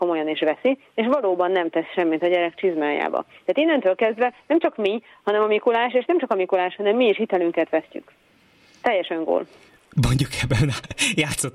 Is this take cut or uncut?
uncut